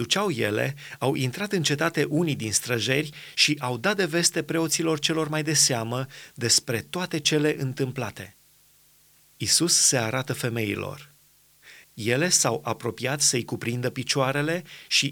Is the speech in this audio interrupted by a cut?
yes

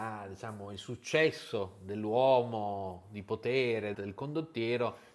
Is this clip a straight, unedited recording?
no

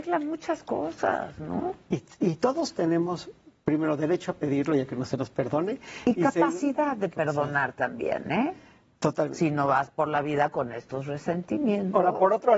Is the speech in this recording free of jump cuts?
yes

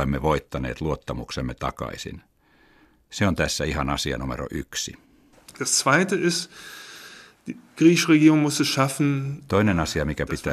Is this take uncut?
yes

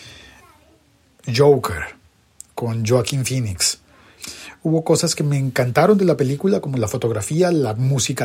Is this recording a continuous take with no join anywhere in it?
yes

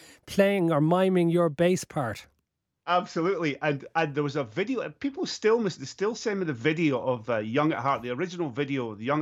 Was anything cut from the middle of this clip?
no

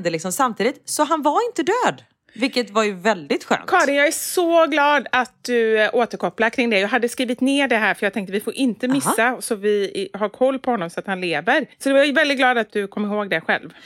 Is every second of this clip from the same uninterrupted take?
no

